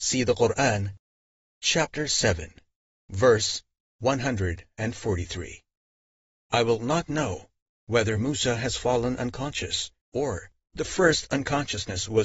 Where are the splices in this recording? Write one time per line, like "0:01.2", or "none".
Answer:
0:06.3
0:10.0